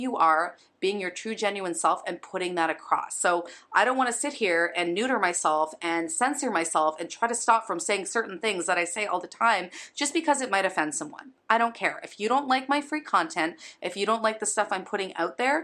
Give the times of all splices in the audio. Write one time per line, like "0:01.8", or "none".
none